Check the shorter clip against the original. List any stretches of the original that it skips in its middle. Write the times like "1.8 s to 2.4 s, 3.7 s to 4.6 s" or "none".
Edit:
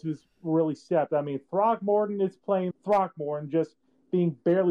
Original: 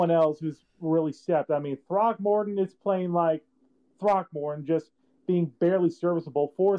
3.1 s to 3.9 s